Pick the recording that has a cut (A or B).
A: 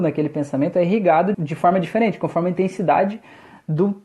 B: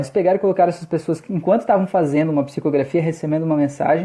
A